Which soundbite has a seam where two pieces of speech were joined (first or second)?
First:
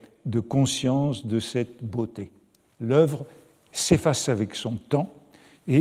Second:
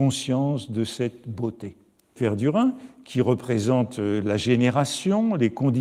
second